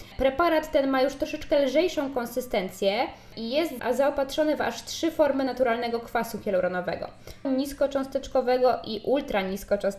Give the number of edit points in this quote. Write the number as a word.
one